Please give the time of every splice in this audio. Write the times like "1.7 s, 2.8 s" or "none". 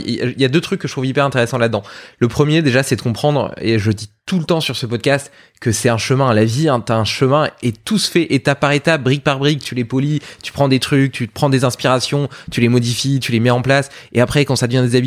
none